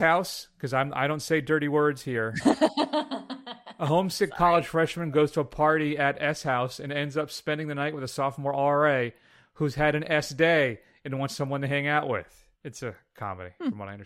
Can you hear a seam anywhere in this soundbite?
yes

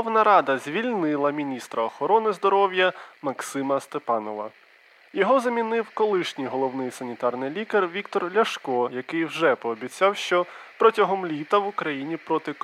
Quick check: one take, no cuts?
yes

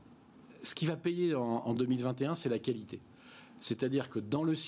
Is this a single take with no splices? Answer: yes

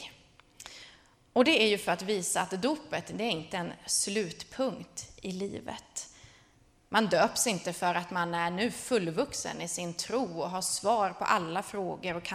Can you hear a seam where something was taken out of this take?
no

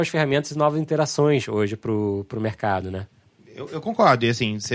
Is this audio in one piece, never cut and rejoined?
yes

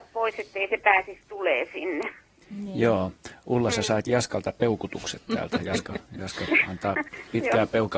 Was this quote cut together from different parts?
no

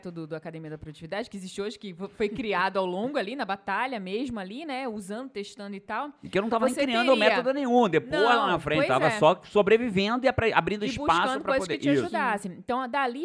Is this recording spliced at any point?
no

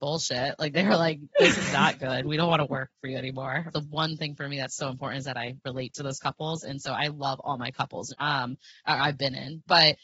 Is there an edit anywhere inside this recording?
yes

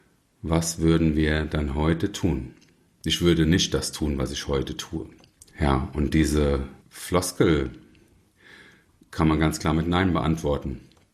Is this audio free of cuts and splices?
no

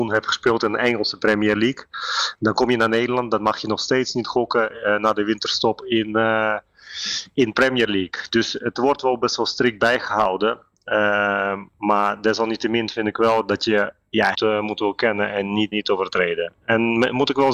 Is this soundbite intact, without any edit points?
no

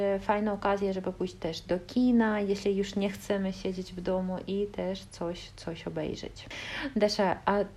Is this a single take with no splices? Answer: yes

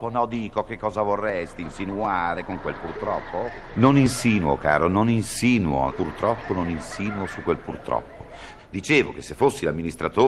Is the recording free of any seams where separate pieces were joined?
no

